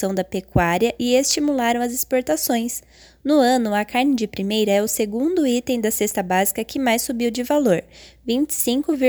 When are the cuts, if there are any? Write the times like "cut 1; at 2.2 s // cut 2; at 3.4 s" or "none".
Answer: none